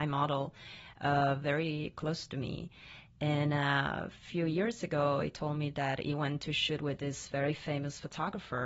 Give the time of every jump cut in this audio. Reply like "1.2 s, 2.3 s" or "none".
none